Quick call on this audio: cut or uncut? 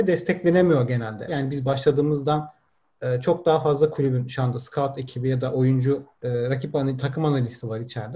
cut